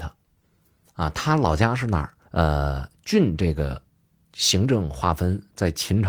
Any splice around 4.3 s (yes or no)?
no